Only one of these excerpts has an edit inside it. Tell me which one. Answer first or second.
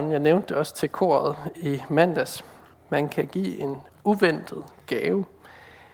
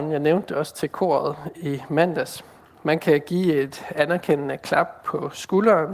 first